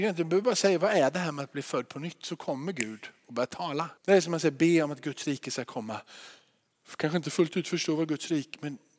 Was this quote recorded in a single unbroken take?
no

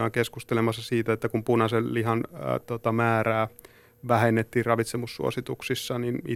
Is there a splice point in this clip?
no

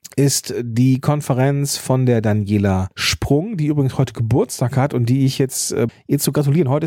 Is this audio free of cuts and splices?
no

